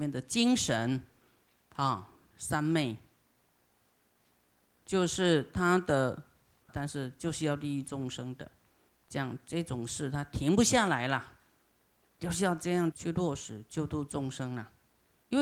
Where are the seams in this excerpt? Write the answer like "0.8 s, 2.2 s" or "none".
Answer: 6.7 s, 12.9 s

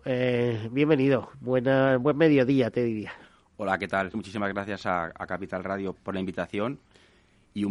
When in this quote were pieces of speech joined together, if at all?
4.1 s, 5.9 s

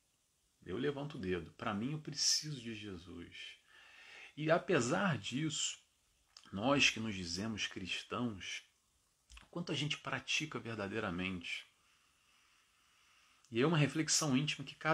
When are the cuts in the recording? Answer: none

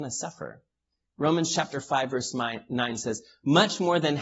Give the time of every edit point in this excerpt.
1.1 s

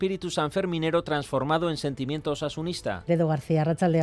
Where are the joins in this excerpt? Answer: 3.1 s

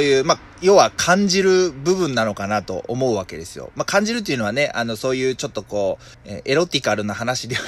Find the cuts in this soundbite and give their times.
6.1 s

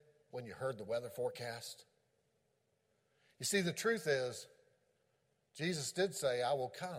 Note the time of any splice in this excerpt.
none

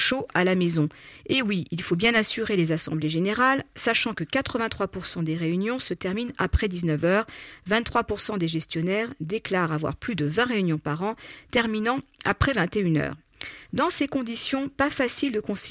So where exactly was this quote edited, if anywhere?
none

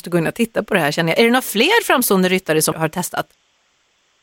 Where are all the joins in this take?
2.7 s

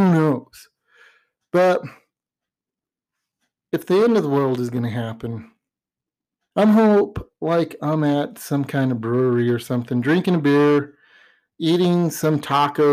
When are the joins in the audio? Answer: 6.5 s

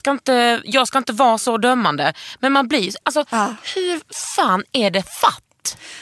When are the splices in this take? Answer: 3.0 s

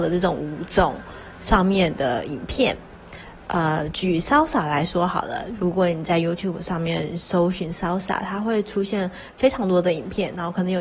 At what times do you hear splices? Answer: none

